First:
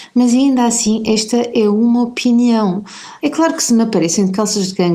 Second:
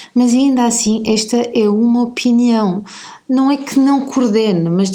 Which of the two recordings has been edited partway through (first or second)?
first